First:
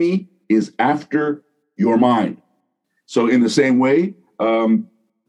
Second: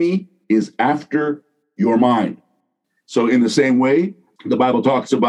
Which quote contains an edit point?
second; 1 cut; at 4.4 s

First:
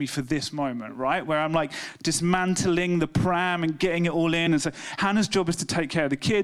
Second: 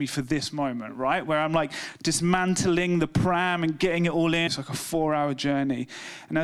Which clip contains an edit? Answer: second; 1 cut; at 4.5 s

